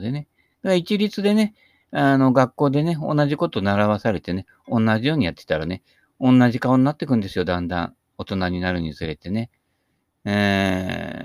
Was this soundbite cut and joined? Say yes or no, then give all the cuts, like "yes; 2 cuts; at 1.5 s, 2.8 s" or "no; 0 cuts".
no; 0 cuts